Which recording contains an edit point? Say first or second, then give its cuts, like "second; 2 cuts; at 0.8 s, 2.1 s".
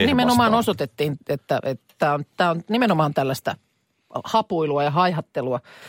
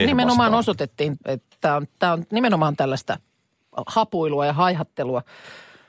second; 1 cut; at 1.2 s